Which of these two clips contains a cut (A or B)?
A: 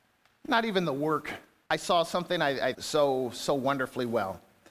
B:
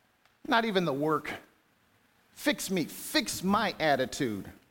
A